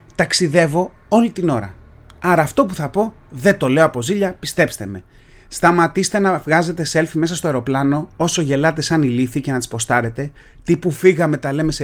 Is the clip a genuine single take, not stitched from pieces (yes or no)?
yes